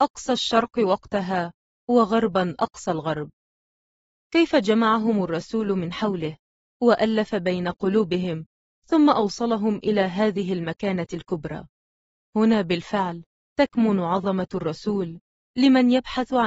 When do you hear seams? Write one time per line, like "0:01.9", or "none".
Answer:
none